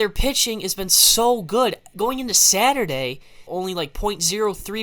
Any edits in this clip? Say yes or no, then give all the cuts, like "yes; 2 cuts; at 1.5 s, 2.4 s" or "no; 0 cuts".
yes; 1 cut; at 3.5 s